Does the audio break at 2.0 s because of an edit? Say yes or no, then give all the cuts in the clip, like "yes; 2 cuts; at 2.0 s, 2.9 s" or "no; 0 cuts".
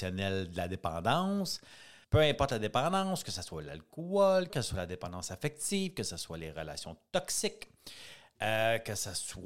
yes; 2 cuts; at 2.0 s, 4.5 s